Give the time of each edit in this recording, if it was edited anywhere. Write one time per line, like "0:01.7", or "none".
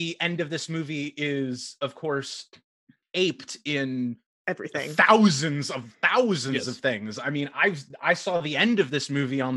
none